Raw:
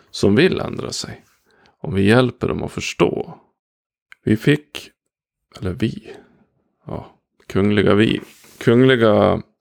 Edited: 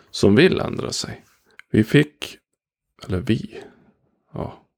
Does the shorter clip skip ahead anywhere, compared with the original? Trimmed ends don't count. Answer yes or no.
yes